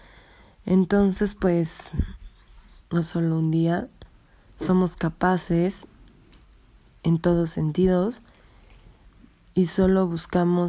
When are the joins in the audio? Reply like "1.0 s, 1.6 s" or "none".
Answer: 2.8 s, 4.6 s